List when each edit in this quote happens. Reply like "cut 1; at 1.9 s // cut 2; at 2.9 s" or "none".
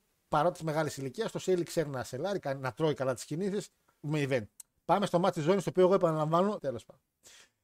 cut 1; at 2.4 s // cut 2; at 4.0 s // cut 3; at 6.6 s

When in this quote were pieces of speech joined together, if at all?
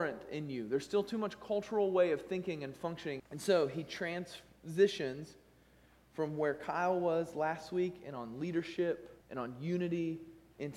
cut 1; at 3.2 s // cut 2; at 9.2 s

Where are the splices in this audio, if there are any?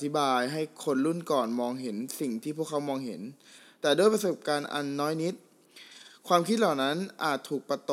none

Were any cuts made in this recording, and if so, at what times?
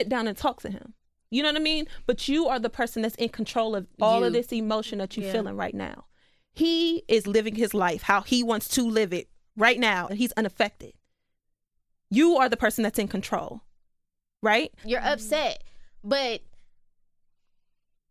cut 1; at 7.2 s // cut 2; at 10.1 s // cut 3; at 14.8 s

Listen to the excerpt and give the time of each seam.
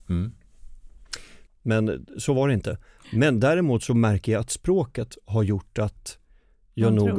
cut 1; at 1.5 s

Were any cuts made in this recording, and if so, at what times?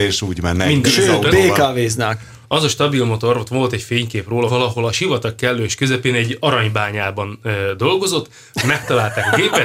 cut 1; at 2.4 s // cut 2; at 4.5 s

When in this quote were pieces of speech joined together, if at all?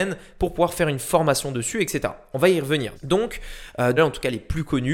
cut 1; at 3.0 s // cut 2; at 4.0 s

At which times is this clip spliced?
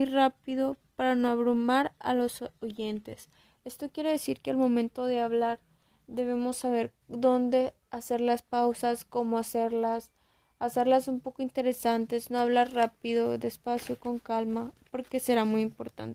cut 1; at 7.0 s

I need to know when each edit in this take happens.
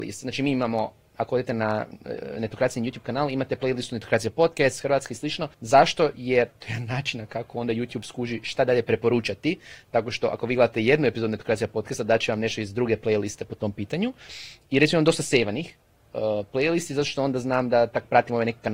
cut 1; at 5.5 s

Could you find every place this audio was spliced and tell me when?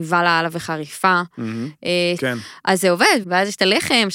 cut 1; at 2.2 s // cut 2; at 3.2 s

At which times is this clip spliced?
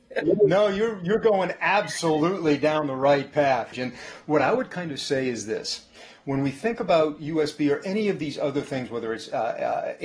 cut 1; at 3.7 s

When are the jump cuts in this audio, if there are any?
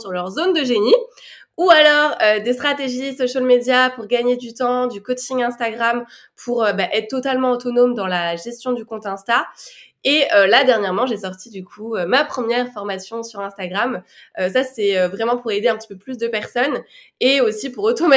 none

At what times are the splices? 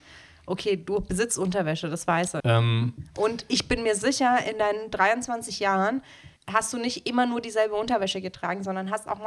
cut 1; at 2.4 s // cut 2; at 6.4 s

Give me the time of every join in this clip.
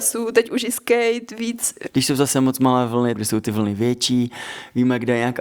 cut 1; at 1.9 s // cut 2; at 3.2 s

